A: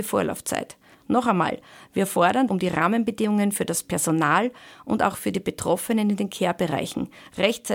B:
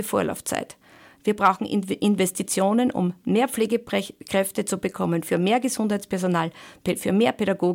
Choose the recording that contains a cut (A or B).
A